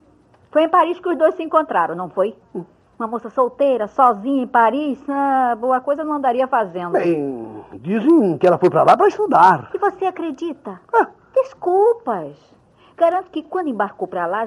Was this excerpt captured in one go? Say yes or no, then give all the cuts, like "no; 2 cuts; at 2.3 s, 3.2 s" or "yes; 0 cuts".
yes; 0 cuts